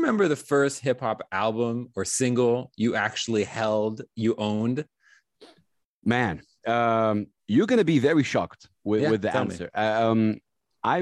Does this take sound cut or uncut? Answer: uncut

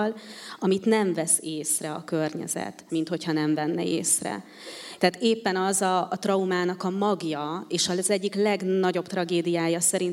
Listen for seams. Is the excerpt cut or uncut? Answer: cut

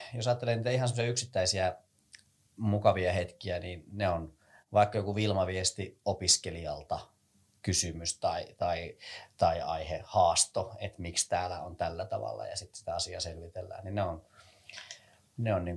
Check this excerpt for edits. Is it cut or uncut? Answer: uncut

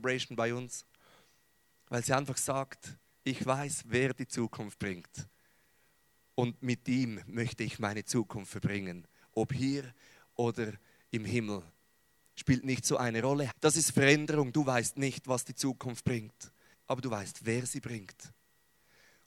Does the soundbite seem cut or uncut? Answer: cut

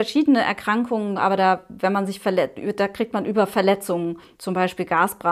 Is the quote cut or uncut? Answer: cut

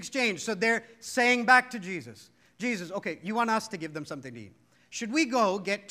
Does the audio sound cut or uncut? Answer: uncut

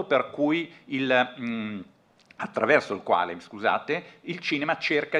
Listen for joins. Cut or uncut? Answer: uncut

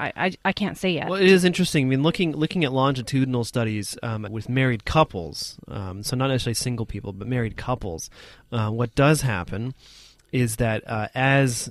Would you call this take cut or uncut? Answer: cut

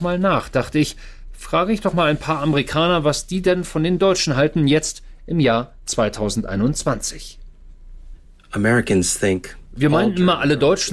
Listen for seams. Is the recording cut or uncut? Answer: uncut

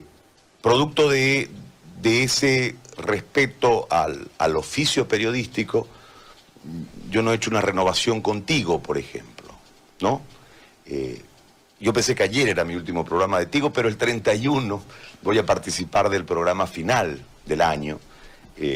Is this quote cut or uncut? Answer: uncut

